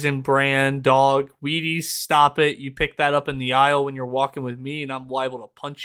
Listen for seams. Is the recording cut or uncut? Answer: uncut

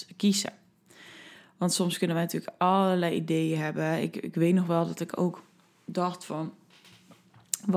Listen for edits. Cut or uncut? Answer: uncut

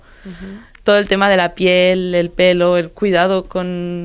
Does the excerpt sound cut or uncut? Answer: uncut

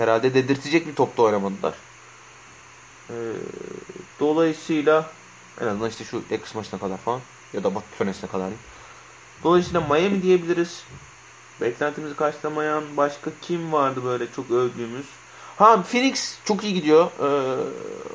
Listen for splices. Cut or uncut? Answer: cut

